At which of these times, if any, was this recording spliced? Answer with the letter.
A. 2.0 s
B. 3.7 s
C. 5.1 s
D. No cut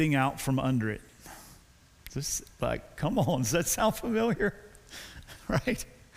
A